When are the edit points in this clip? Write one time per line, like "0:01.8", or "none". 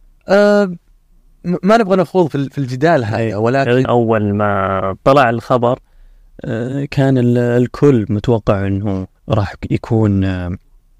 0:03.8
0:09.2